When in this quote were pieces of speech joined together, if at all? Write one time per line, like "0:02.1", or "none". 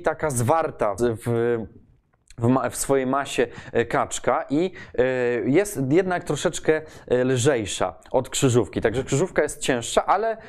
0:01.0